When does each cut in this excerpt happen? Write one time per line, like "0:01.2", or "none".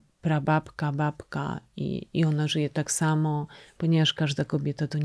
none